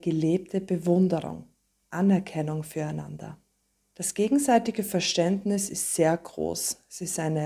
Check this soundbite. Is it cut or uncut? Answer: uncut